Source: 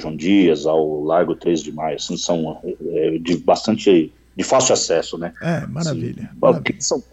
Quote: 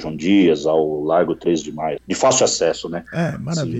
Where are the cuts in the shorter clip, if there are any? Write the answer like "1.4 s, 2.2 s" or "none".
2.0 s